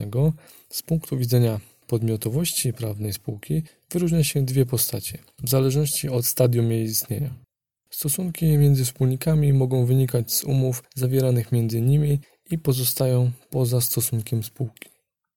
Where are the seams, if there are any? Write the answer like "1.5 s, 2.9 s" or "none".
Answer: 7.9 s

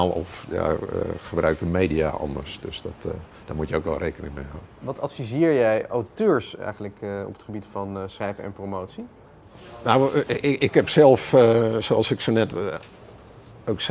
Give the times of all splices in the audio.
none

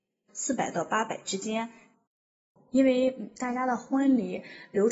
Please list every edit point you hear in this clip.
none

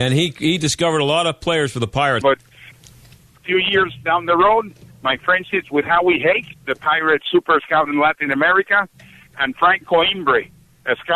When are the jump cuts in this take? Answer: 2.2 s

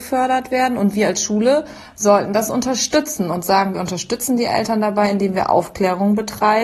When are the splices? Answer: none

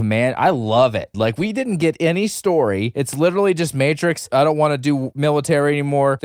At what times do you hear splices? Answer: 1.1 s

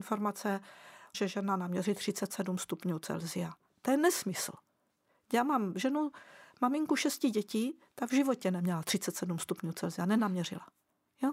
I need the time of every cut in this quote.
1.1 s

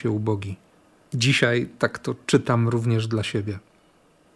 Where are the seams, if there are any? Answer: 1.1 s

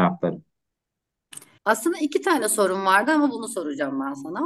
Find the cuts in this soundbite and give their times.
1.6 s

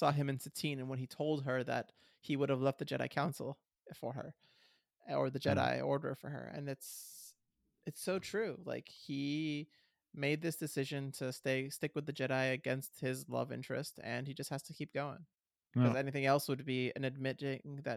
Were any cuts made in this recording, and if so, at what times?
none

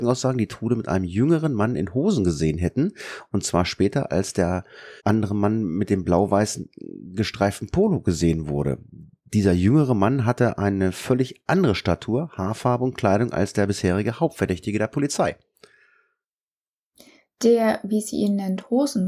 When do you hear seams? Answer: 5.0 s

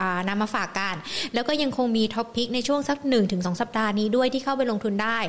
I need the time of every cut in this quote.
none

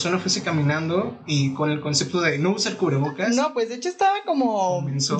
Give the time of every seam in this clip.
none

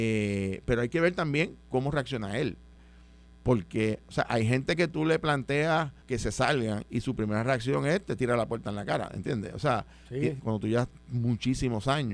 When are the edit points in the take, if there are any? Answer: 6.0 s, 10.4 s

